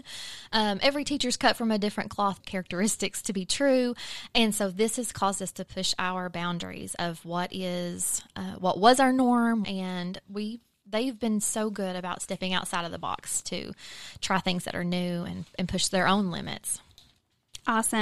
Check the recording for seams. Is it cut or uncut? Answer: cut